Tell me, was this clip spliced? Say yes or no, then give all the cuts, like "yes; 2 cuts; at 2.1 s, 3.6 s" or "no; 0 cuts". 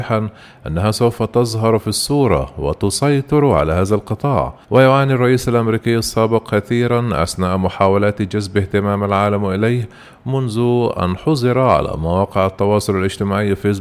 yes; 1 cut; at 4.6 s